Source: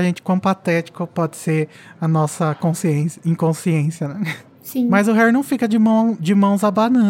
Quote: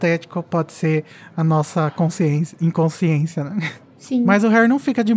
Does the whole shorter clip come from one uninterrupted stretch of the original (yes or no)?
yes